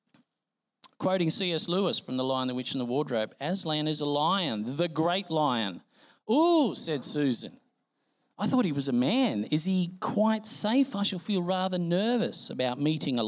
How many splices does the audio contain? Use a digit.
0